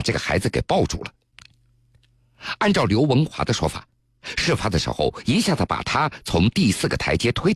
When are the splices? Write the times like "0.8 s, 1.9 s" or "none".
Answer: 5.2 s

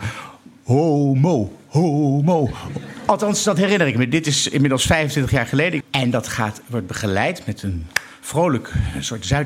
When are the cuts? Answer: 5.8 s

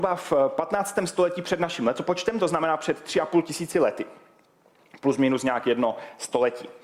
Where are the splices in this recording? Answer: none

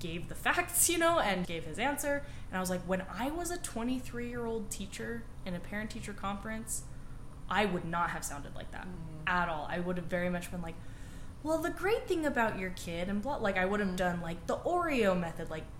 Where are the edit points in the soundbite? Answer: 1.5 s

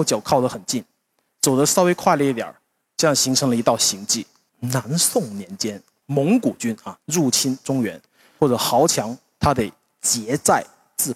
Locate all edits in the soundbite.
4.5 s, 8.4 s

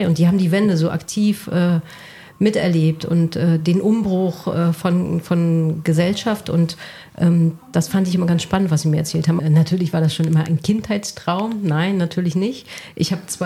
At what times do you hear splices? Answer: 9.4 s

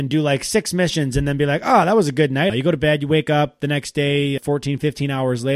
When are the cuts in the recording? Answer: 2.5 s, 4.4 s

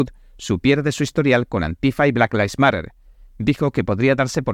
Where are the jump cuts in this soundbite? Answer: none

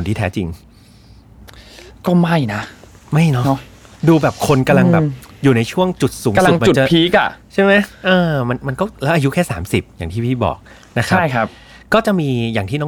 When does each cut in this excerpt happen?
none

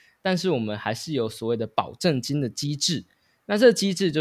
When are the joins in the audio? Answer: none

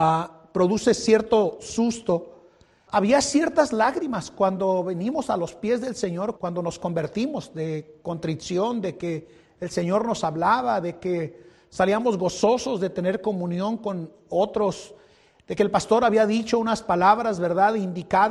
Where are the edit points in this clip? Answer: 2.9 s, 6.4 s

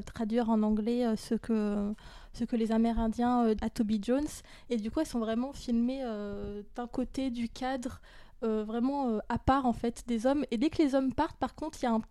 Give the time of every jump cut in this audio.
3.6 s

